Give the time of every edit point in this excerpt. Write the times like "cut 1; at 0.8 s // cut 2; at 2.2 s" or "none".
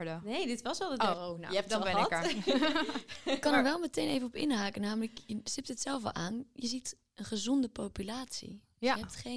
cut 1; at 1.1 s